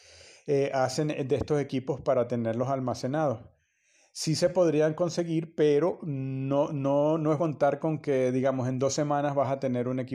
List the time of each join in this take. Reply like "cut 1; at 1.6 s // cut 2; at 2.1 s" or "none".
cut 1; at 7.4 s

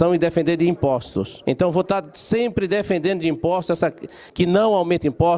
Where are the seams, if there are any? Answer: cut 1; at 4.3 s

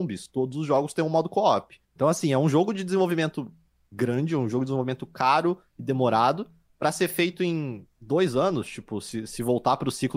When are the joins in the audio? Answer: cut 1; at 1.8 s

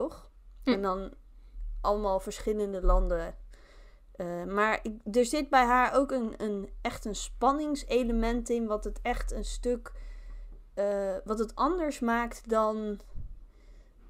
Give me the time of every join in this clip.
none

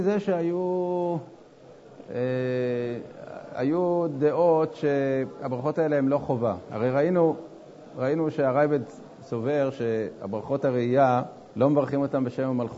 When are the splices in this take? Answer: cut 1; at 11.5 s

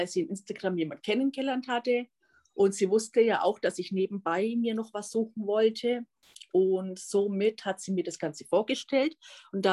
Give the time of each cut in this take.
none

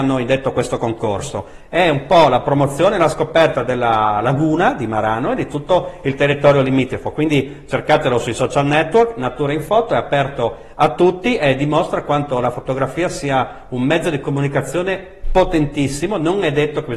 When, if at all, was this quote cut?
none

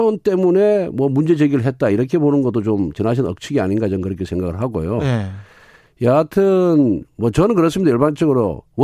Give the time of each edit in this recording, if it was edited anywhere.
none

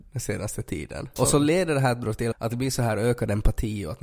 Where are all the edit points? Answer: cut 1; at 1.2 s // cut 2; at 2.3 s

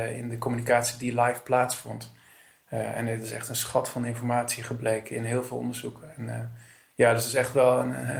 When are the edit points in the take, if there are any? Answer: none

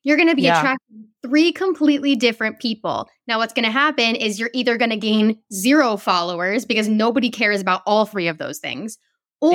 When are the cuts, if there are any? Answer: none

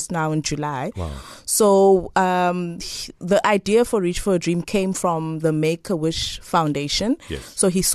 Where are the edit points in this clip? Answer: none

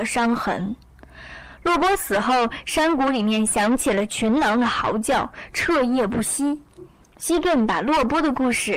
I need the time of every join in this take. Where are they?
none

